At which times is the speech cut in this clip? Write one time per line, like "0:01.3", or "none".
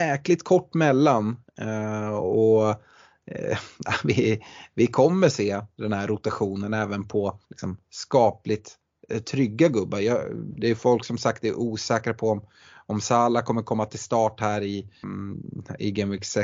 0:07.4
0:15.0